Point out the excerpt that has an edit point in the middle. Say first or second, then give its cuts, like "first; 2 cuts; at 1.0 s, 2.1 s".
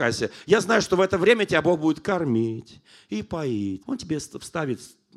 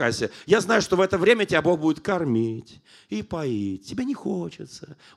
first; 1 cut; at 3.8 s